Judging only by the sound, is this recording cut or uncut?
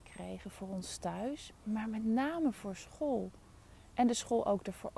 uncut